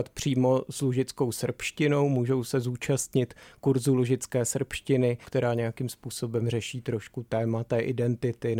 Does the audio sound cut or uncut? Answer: cut